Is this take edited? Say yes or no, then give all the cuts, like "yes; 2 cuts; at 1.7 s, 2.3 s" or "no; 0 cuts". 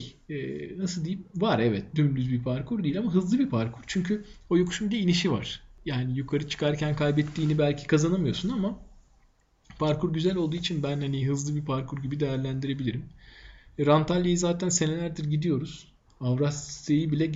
yes; 1 cut; at 16.1 s